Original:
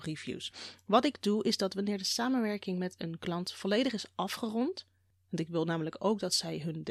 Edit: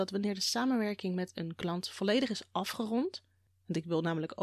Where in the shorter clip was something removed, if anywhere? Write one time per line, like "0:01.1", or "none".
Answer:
none